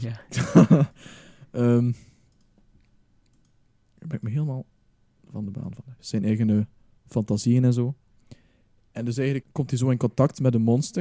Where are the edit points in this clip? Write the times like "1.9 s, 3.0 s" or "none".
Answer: 6.0 s, 9.4 s